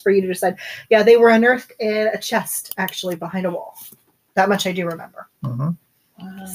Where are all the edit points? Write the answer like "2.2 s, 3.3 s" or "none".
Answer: none